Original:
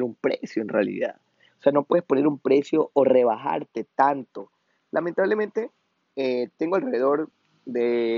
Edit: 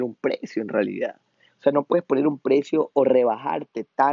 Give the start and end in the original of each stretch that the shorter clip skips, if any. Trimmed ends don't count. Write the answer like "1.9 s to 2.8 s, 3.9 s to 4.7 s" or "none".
none